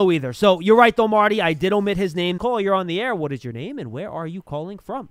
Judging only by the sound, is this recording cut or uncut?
cut